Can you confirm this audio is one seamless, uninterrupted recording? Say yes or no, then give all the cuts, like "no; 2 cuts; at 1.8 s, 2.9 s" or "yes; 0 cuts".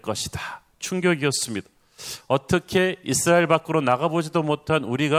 yes; 0 cuts